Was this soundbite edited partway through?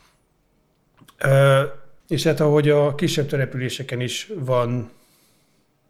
yes; 1 cut; at 2.0 s

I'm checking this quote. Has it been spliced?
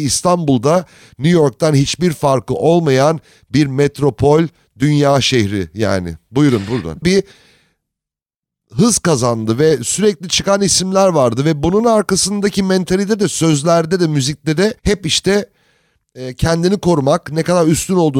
yes; 2 cuts; at 7.0 s, 14.8 s

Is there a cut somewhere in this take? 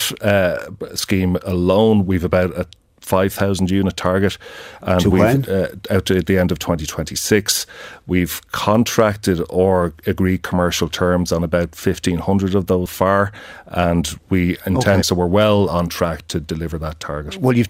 yes; 2 cuts; at 12.9 s, 15.0 s

